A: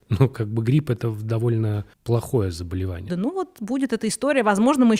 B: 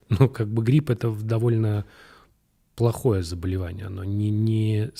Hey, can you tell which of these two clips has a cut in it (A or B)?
A